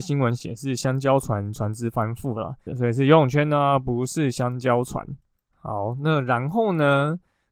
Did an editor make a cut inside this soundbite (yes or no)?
yes